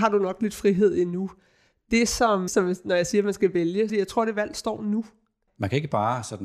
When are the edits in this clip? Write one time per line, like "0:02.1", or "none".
0:02.5
0:03.9
0:05.5